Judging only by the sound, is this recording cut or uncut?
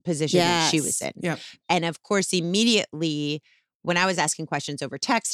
cut